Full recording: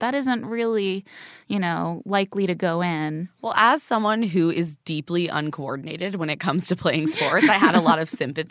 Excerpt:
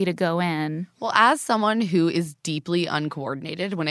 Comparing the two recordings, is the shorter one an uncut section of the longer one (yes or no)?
yes